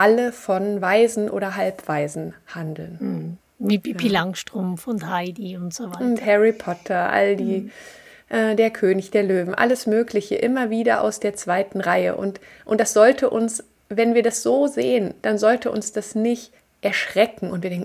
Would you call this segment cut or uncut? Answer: uncut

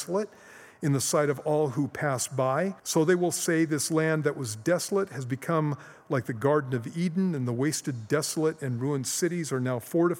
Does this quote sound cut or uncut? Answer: cut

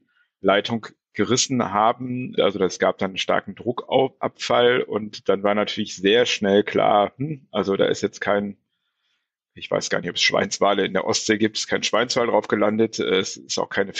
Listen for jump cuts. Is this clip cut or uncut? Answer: cut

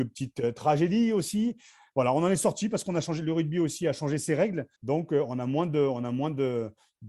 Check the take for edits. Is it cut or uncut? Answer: cut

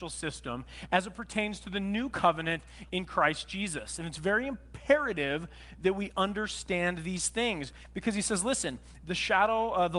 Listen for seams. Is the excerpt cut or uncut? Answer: uncut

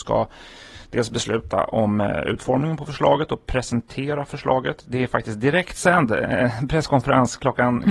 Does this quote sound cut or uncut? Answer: uncut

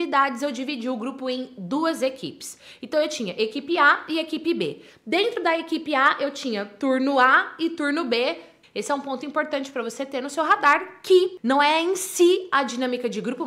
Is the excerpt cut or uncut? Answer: cut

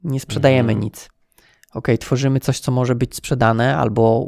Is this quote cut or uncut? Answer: uncut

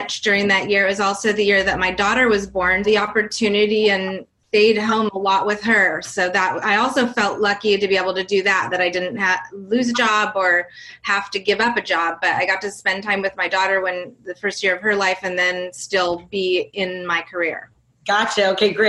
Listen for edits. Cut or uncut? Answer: cut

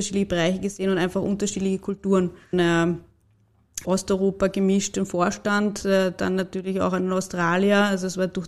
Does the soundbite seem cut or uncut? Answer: cut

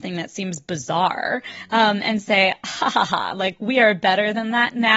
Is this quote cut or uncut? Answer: uncut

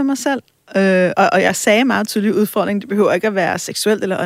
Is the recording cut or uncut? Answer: uncut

